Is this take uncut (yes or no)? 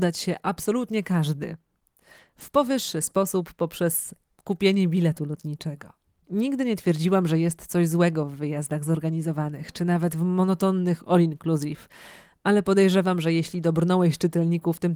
yes